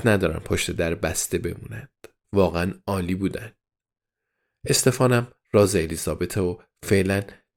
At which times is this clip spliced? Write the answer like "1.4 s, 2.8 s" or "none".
2.2 s